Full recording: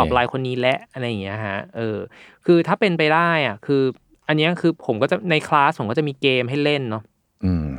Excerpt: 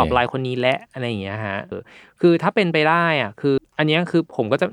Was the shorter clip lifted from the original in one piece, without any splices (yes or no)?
no